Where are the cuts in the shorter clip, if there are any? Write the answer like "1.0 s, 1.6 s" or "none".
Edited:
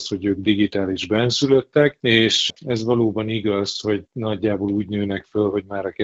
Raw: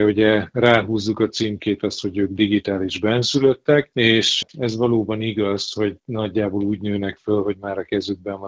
none